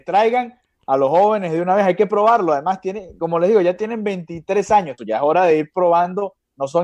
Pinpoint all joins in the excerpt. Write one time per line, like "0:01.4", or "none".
0:05.0

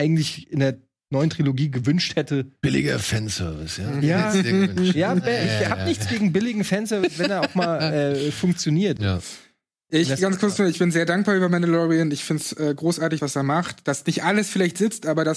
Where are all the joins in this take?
0:09.0
0:13.2

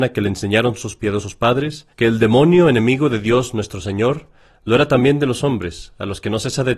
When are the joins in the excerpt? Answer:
0:01.9

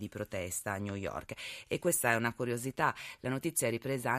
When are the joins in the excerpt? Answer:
none

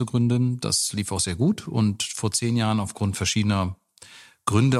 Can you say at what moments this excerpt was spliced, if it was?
none

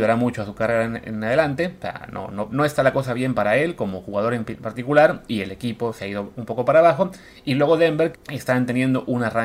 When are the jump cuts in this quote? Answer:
0:02.5
0:08.1

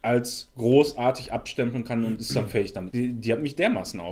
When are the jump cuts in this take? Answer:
0:02.9

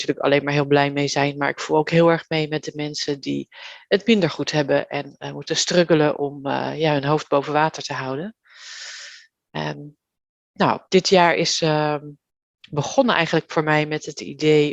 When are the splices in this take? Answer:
0:10.9

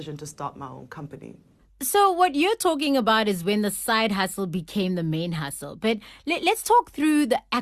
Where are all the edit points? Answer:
none

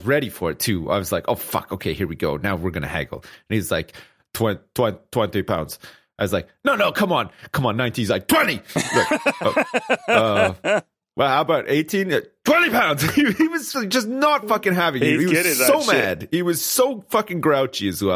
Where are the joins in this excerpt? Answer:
0:05.5

